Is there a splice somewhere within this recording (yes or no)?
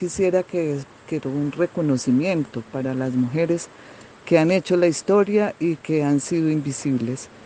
yes